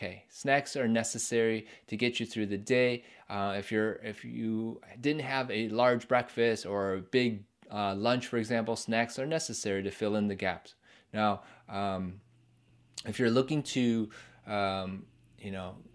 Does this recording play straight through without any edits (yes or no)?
yes